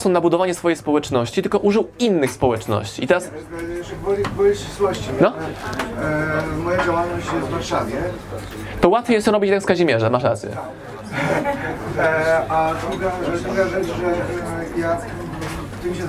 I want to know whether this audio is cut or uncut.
uncut